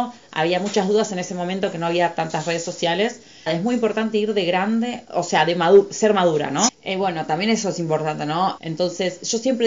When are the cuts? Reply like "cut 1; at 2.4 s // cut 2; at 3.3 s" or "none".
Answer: cut 1; at 3.5 s // cut 2; at 6.7 s // cut 3; at 8.6 s